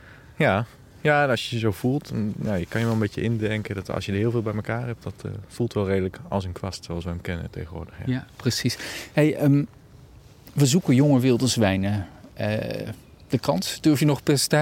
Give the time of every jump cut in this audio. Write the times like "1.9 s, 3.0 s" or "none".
none